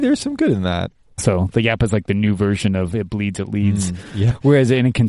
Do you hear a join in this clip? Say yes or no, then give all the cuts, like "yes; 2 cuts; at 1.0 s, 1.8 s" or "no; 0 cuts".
yes; 1 cut; at 1.2 s